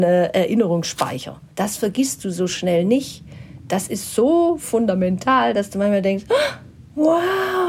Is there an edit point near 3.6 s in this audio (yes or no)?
no